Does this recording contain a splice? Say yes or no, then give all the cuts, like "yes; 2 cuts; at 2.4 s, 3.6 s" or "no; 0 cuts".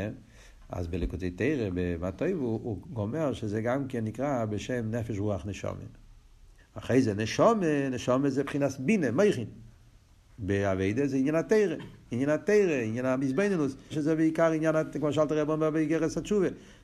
yes; 3 cuts; at 6.6 s, 12.0 s, 13.9 s